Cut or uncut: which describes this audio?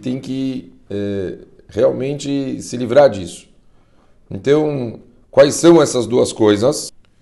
uncut